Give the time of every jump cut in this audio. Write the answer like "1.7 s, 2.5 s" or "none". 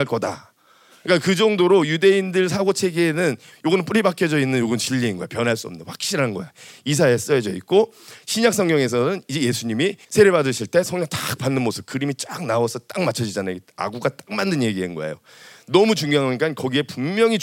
10.0 s